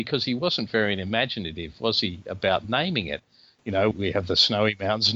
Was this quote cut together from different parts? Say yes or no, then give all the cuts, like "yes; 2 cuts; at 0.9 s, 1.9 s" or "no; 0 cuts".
yes; 1 cut; at 3.9 s